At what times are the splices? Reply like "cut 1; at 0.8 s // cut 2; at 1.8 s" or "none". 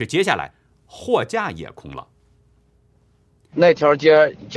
cut 1; at 3.5 s